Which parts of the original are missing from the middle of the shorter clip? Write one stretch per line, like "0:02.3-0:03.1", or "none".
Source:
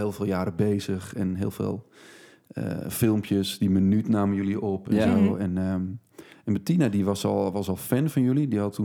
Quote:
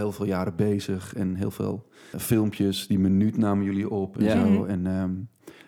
0:02.1-0:02.8